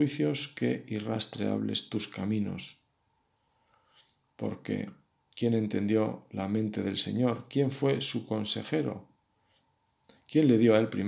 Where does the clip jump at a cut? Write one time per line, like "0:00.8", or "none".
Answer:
none